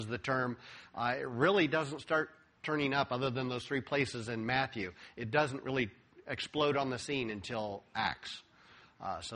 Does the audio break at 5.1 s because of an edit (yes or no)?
no